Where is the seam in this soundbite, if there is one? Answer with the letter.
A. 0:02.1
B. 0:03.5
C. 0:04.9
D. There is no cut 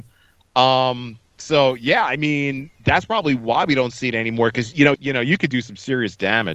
C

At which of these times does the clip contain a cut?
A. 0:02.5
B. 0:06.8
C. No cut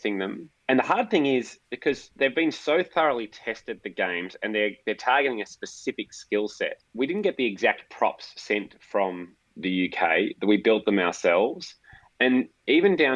B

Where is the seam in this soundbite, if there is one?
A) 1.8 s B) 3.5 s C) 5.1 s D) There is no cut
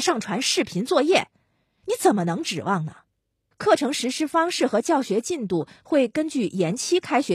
B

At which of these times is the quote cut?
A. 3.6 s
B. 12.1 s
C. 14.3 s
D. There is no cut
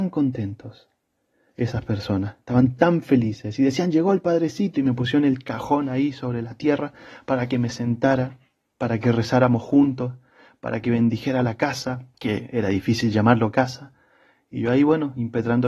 B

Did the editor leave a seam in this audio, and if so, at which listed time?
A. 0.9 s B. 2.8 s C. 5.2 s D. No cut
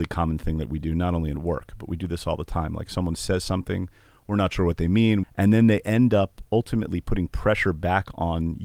C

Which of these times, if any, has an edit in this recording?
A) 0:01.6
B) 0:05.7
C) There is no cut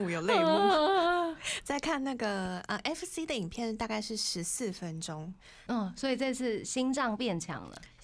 B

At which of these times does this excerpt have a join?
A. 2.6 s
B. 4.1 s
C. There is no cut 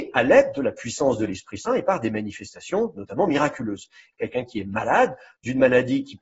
B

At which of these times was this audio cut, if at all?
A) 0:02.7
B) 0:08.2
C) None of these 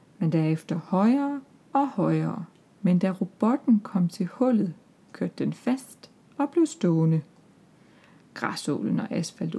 A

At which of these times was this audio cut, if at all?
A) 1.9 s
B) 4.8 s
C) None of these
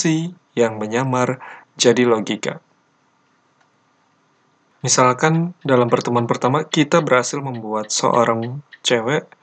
B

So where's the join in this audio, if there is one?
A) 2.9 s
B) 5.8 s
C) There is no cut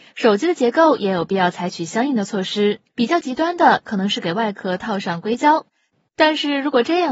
A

